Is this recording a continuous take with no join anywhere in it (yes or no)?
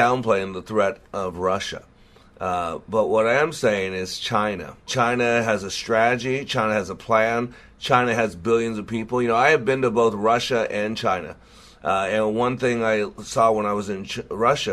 no